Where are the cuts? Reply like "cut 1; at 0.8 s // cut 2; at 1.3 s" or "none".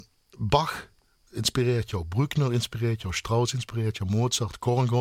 none